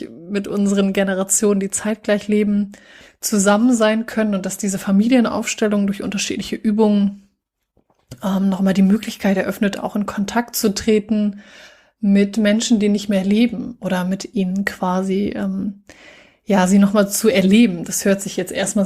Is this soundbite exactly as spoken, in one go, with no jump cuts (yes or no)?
yes